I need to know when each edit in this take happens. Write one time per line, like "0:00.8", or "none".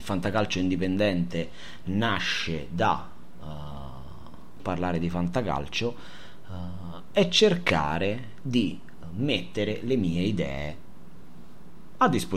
0:04.6